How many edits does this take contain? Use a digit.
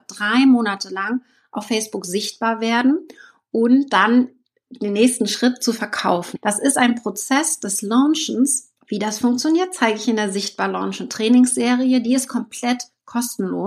2